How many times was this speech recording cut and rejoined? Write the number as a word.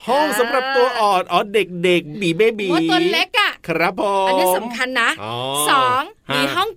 one